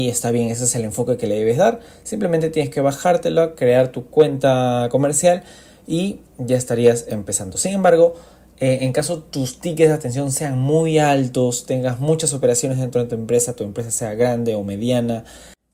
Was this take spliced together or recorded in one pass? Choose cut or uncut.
uncut